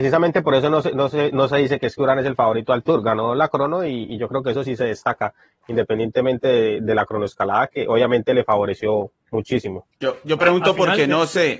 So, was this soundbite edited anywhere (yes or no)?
no